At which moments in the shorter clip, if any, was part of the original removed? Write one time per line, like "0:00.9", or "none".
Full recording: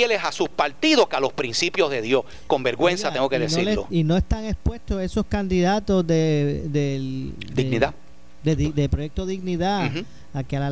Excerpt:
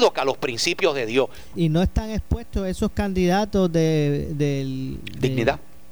0:01.5